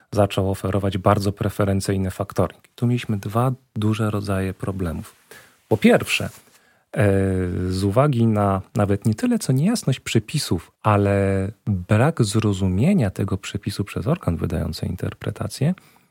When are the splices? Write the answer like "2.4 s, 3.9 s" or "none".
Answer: 10.7 s